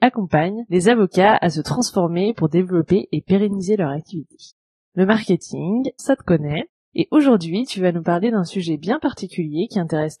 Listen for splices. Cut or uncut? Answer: cut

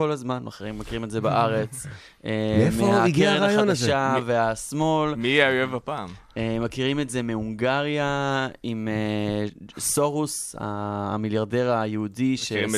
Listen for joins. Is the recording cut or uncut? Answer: uncut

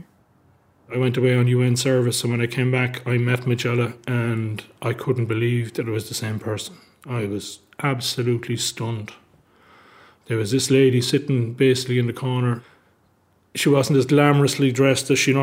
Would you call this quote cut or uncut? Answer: uncut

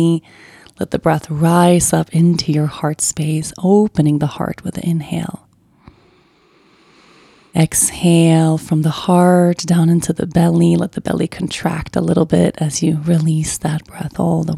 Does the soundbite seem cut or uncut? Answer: uncut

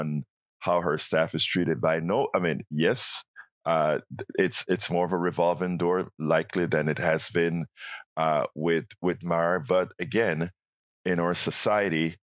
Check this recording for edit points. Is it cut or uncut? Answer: uncut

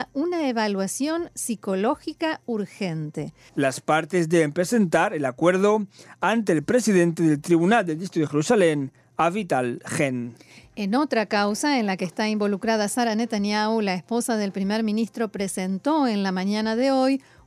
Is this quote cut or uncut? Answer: cut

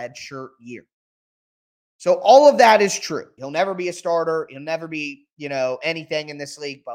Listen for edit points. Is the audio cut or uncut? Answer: cut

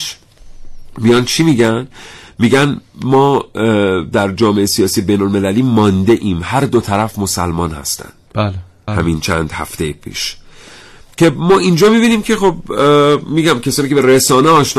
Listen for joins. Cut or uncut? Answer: cut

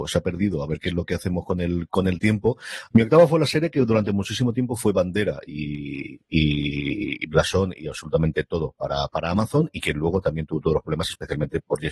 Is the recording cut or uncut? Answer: cut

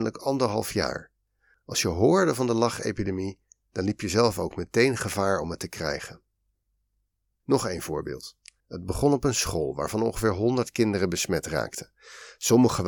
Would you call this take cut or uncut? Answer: cut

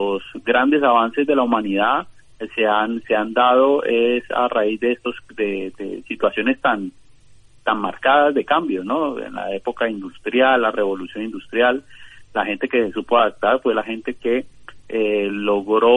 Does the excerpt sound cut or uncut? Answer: uncut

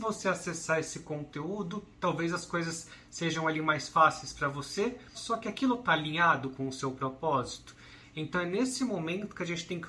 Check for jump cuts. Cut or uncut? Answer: cut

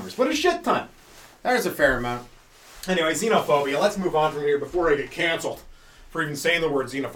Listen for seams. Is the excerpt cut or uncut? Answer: uncut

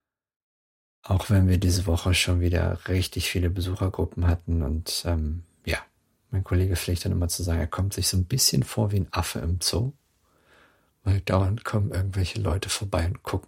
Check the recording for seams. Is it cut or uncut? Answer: uncut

